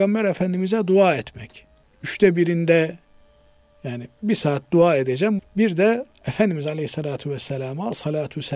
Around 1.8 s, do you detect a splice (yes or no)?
yes